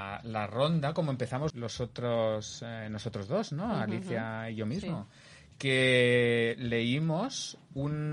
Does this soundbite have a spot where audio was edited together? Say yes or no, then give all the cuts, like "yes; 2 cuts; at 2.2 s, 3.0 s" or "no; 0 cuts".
yes; 1 cut; at 1.5 s